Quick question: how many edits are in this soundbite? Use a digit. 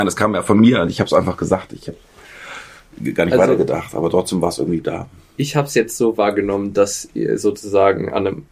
0